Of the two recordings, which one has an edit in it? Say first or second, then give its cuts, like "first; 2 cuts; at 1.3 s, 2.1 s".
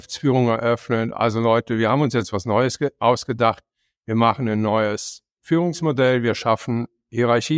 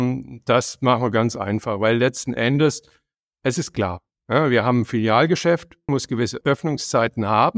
second; 1 cut; at 5.9 s